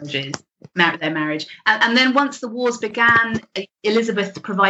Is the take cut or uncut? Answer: uncut